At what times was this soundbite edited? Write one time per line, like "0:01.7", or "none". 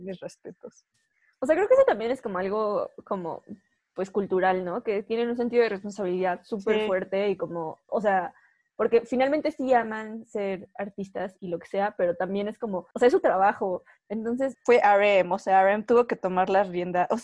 0:07.9
0:12.9
0:14.5